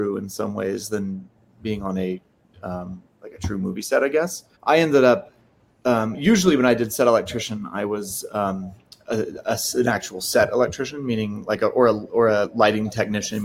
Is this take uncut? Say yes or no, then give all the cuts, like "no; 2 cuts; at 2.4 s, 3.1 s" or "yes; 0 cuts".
no; 1 cut; at 4.5 s